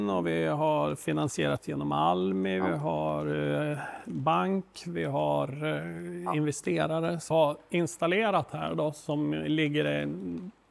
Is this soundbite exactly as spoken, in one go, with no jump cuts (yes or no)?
no